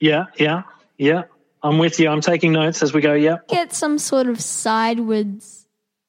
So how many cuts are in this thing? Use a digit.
1